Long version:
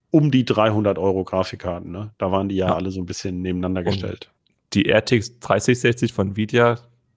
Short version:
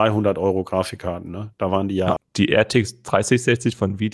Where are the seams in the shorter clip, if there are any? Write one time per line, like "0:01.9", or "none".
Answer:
0:02.2